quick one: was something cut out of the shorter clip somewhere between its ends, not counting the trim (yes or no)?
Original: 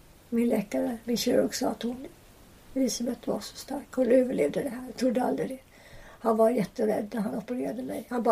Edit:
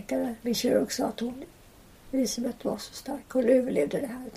no